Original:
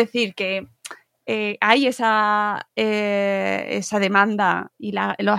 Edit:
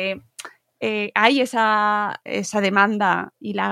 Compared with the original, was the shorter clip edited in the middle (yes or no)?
yes